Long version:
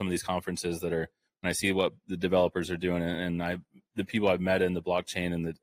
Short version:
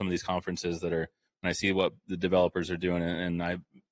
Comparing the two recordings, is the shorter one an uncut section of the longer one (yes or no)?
yes